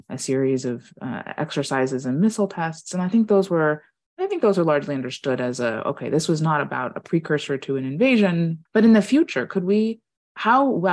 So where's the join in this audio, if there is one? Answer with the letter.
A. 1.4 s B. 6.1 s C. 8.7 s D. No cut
C